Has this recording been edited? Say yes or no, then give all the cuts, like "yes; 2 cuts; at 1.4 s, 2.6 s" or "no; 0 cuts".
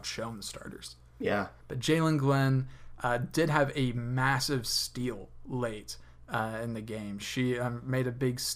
yes; 1 cut; at 1.6 s